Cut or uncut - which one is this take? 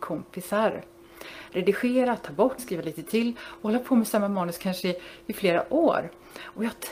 cut